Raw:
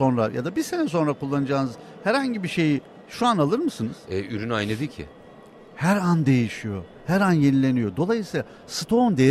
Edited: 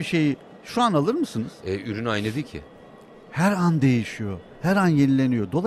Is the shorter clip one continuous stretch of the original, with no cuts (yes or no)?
yes